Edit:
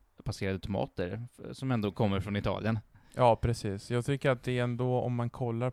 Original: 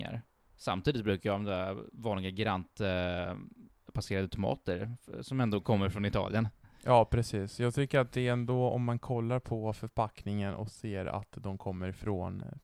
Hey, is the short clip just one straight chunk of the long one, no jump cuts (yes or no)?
yes